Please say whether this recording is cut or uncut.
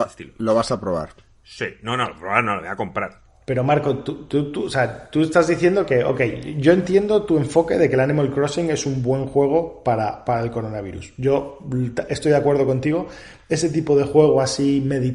uncut